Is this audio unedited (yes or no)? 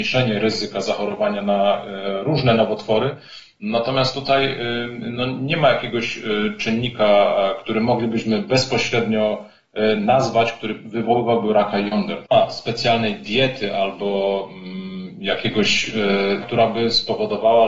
no